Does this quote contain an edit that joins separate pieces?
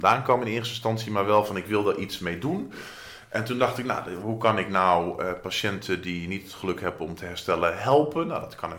no; 0 cuts

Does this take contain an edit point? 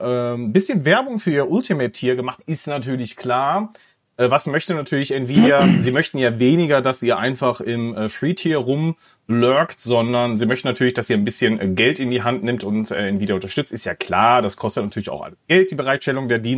no; 0 cuts

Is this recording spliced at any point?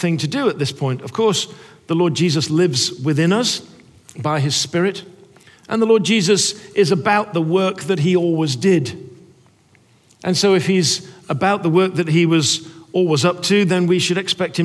no; 0 cuts

